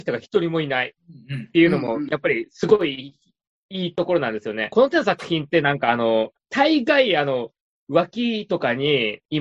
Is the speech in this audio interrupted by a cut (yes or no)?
no